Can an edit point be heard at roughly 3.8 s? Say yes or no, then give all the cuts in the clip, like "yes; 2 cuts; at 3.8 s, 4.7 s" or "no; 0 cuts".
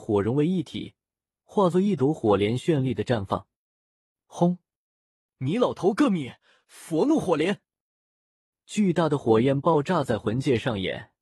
no; 2 cuts; at 5.3 s, 8.5 s